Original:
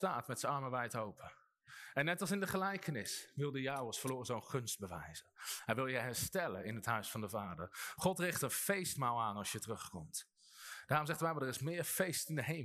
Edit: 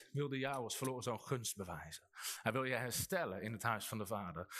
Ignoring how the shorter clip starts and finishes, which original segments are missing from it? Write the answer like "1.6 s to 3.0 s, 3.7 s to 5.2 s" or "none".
none